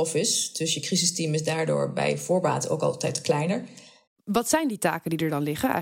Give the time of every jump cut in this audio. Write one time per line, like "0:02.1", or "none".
0:04.1